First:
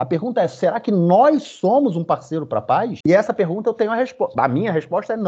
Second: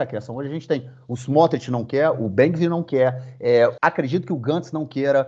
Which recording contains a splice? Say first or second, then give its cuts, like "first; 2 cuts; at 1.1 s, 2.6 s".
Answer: second; 1 cut; at 2.1 s